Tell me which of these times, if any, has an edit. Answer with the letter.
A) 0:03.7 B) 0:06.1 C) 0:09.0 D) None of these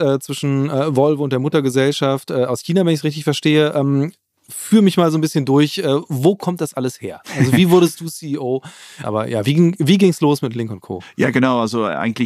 C